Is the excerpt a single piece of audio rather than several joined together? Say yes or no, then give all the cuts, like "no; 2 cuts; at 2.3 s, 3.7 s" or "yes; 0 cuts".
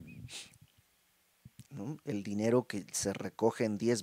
no; 1 cut; at 1.6 s